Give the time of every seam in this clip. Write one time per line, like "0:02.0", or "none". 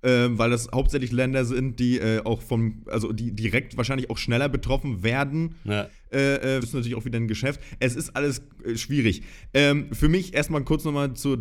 0:06.6